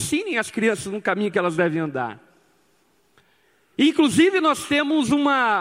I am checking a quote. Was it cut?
no; 0 cuts

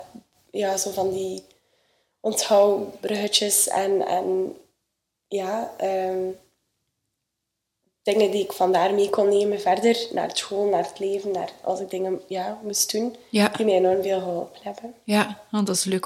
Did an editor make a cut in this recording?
no; 0 cuts

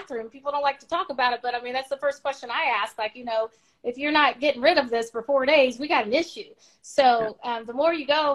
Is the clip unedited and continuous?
yes; 0 cuts

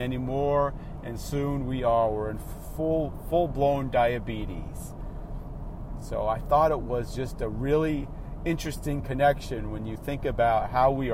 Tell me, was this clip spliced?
no; 0 cuts

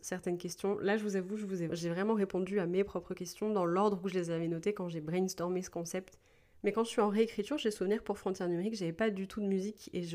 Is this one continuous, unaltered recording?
no; 2 cuts; at 1.7 s, 6.5 s

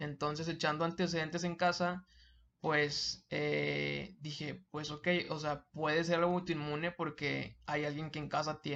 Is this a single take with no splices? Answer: yes; 0 cuts

